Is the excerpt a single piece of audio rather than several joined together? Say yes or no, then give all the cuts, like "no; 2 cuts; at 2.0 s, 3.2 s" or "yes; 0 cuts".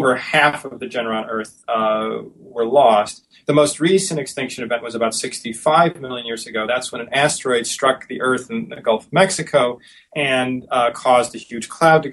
yes; 0 cuts